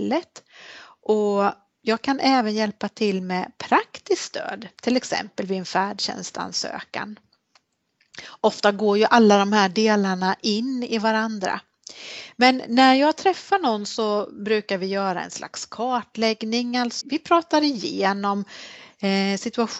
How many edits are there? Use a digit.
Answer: 1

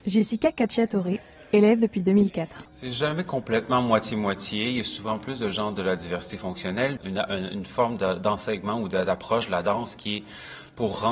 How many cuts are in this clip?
2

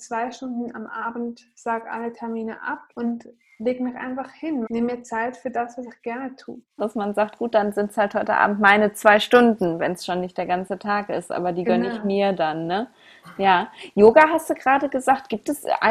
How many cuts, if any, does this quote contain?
3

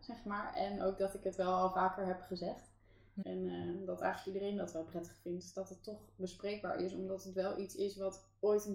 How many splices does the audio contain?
1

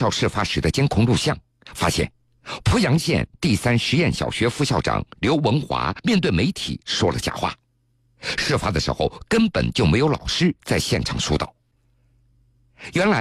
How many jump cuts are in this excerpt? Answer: 0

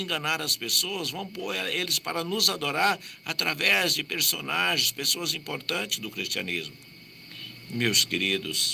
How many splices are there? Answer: 0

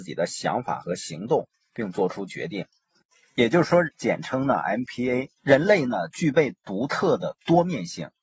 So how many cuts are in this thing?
2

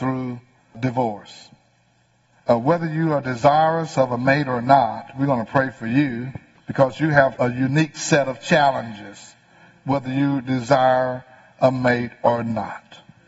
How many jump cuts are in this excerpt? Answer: 1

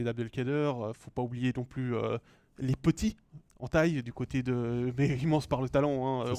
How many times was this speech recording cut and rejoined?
1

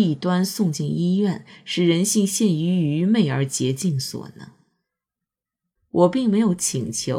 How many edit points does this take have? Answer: 1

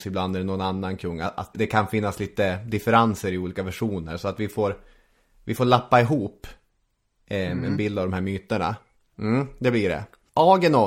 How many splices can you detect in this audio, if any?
2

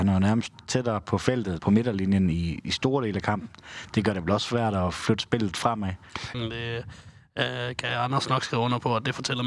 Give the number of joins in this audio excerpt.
2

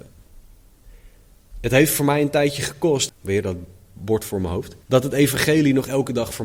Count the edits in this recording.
2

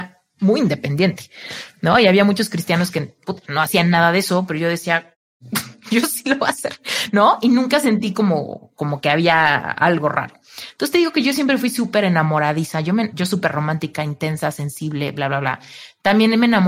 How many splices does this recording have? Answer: 1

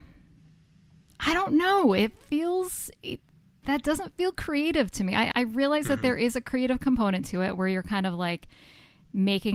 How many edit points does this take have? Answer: 1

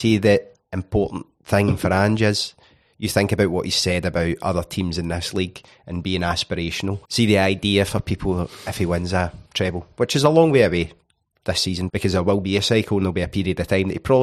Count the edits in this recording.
3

